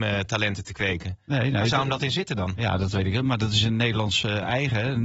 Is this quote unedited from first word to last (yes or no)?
yes